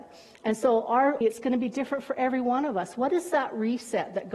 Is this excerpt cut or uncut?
cut